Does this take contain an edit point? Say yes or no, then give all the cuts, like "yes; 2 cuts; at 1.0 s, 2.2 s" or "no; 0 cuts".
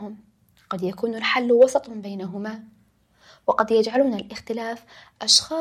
no; 0 cuts